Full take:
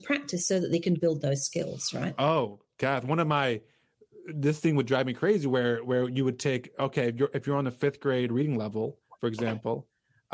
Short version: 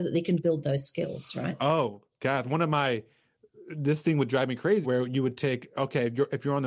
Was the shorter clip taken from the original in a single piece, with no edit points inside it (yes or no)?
no